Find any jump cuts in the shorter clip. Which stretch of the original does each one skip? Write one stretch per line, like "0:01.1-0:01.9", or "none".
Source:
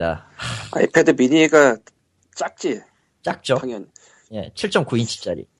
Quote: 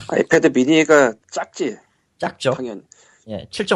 0:01.8-0:02.2